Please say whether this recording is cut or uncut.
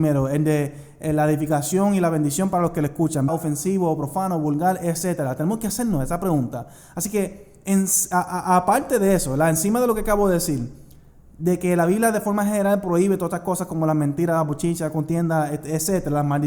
cut